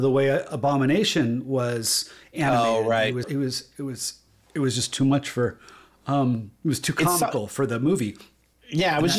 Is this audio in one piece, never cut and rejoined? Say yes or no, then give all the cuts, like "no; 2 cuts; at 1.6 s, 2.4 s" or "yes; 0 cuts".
no; 1 cut; at 3.2 s